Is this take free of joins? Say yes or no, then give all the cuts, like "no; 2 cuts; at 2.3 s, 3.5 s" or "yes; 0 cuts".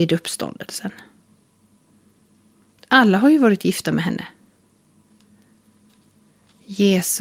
yes; 0 cuts